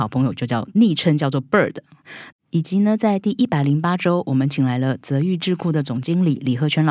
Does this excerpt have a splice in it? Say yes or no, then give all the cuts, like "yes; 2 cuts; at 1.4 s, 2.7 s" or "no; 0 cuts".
yes; 1 cut; at 2.3 s